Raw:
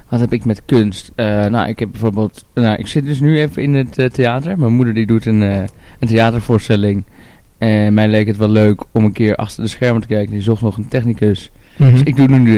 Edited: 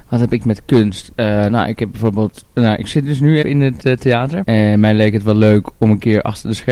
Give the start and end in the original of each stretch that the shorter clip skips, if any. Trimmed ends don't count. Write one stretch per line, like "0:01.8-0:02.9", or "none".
0:03.4-0:03.5
0:04.6-0:07.6